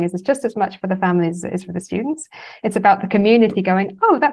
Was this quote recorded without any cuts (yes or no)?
yes